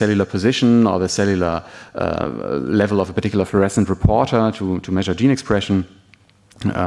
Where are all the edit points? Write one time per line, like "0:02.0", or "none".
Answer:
none

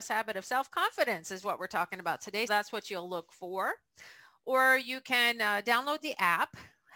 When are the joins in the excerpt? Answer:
0:02.5

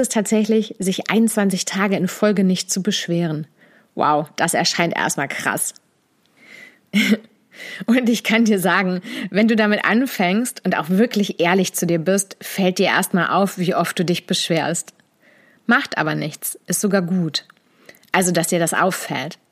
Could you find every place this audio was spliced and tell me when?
none

